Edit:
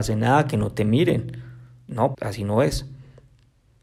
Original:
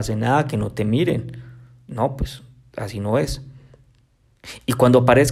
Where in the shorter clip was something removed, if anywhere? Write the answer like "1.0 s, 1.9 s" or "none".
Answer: 2.1 s